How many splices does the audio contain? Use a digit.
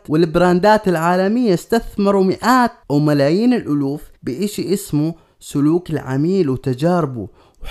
1